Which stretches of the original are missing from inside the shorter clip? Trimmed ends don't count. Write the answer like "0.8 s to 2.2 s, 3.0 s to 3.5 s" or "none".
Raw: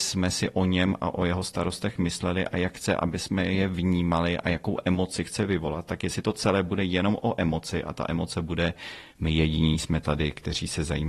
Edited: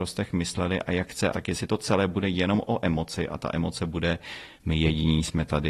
3.0 s to 5.9 s